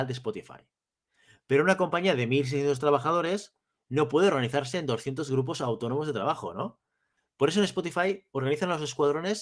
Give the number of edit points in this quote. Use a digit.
0